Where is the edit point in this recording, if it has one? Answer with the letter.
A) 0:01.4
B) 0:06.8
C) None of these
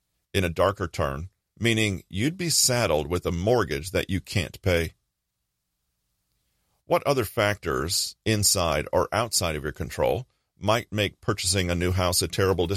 A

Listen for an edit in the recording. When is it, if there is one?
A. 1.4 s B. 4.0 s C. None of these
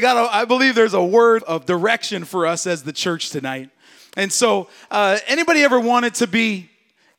A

